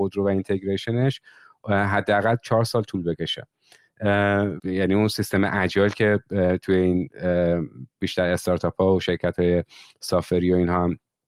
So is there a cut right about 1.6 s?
no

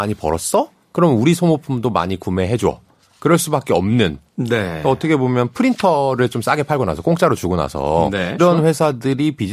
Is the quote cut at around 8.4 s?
yes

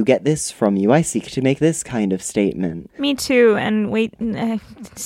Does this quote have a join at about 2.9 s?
yes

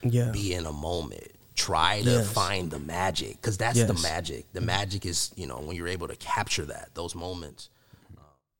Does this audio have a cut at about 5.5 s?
no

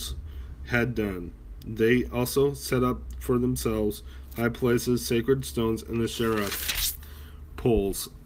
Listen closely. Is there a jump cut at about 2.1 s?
no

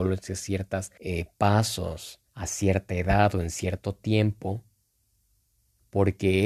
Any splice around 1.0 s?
yes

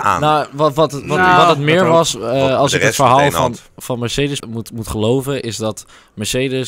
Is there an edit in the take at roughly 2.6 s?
no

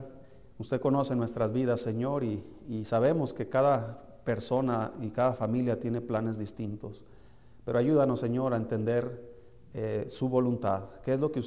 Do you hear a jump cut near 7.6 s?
no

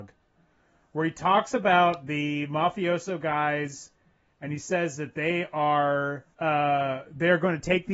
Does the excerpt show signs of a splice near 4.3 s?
no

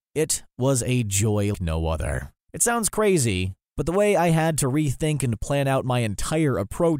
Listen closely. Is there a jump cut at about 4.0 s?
no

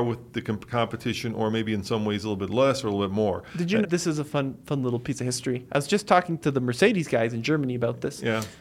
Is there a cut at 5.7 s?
no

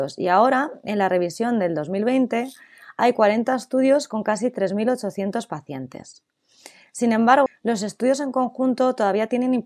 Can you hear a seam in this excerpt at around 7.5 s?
yes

